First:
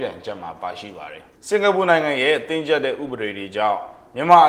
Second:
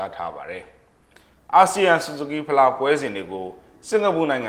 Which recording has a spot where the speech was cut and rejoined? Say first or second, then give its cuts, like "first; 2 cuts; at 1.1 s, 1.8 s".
first; 1 cut; at 1.3 s